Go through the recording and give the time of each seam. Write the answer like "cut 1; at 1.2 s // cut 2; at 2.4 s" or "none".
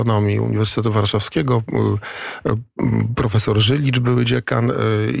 none